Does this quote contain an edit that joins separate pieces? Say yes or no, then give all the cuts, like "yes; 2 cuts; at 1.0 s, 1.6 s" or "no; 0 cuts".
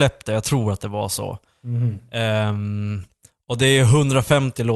no; 0 cuts